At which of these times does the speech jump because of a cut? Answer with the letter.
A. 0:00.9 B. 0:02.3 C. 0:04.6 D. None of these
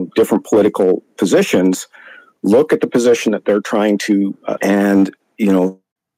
C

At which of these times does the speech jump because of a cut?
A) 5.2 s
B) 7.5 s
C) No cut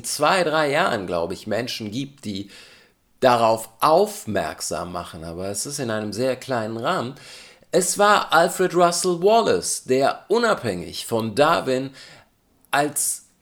C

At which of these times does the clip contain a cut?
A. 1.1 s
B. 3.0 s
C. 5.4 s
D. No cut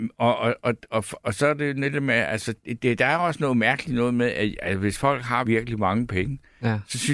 C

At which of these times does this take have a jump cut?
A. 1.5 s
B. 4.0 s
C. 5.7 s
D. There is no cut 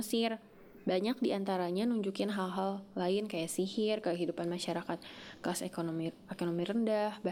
D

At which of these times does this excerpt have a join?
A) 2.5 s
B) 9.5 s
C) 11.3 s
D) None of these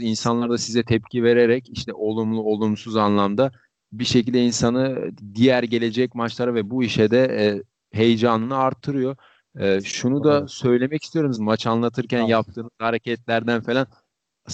C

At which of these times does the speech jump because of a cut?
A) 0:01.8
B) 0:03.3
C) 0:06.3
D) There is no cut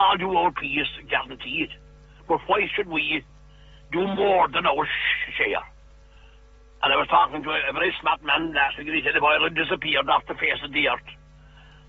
D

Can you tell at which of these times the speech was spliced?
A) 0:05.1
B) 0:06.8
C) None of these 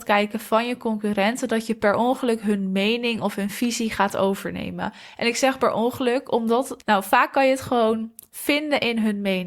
B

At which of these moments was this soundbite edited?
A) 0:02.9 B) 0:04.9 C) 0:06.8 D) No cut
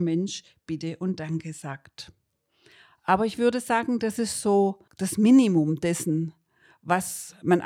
B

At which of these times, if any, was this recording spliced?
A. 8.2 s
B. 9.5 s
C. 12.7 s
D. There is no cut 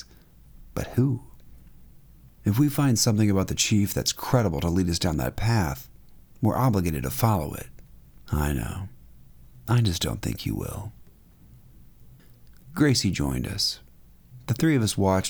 A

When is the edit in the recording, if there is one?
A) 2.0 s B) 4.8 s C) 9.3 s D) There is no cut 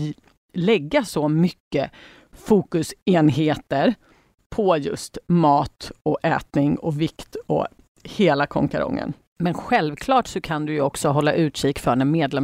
C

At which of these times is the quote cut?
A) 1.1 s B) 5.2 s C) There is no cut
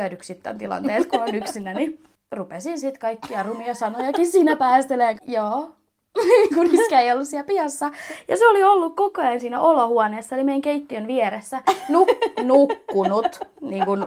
B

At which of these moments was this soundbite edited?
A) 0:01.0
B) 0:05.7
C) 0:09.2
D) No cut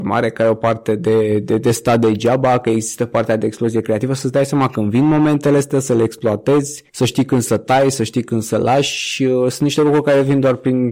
D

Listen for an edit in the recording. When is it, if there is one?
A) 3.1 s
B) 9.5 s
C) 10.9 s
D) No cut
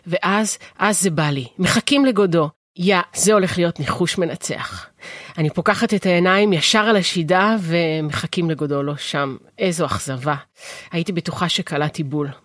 A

